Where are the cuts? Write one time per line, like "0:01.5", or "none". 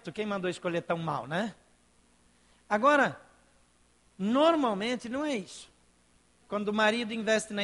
0:06.4